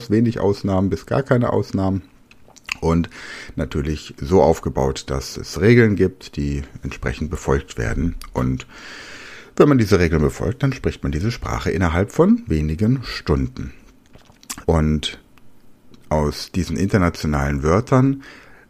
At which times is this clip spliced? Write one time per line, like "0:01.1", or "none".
0:14.6